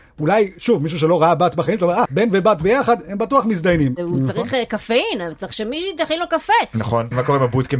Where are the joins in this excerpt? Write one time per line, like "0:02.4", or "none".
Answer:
0:02.1
0:04.0